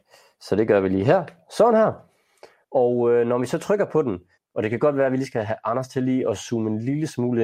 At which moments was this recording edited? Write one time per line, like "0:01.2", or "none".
0:02.6
0:04.4